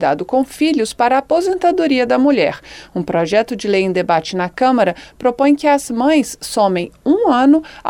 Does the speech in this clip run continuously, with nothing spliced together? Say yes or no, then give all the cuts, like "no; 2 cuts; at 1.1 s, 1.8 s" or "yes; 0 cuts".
yes; 0 cuts